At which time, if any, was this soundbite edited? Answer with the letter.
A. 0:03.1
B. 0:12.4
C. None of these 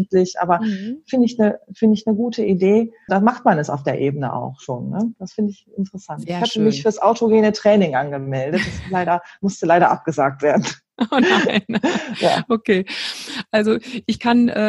A